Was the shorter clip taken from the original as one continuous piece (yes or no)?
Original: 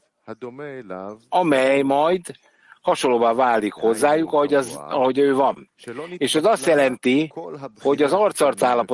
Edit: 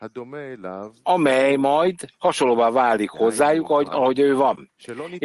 no